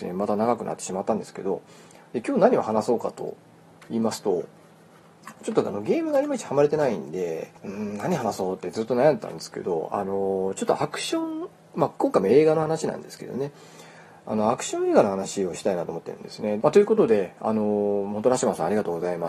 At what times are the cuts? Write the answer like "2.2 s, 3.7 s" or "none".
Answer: 16.6 s

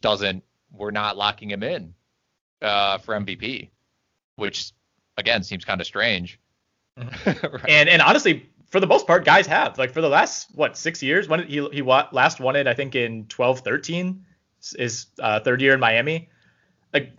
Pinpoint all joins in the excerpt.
7.1 s

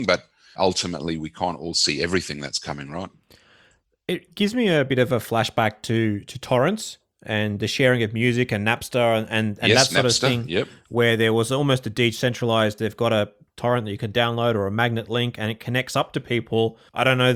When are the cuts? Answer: 12.8 s

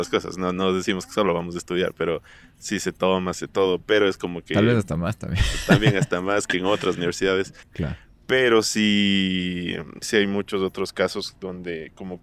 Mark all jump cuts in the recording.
3.3 s, 7.6 s, 10.0 s

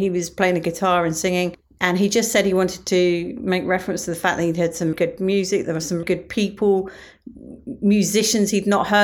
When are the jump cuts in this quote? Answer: 4.9 s, 6.0 s

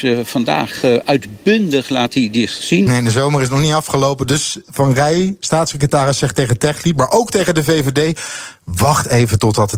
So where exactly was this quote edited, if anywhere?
2.9 s

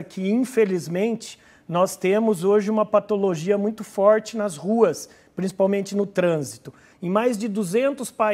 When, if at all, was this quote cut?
6.9 s

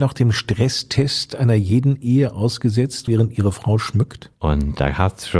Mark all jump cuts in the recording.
3.1 s, 4.3 s

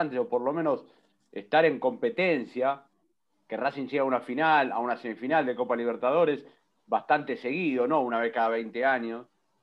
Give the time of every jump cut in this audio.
none

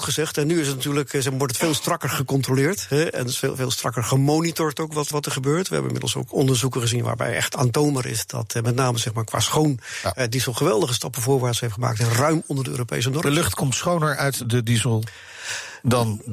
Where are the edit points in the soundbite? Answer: 5.1 s

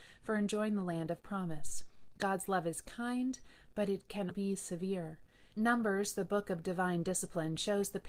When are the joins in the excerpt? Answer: 4.3 s, 5.5 s

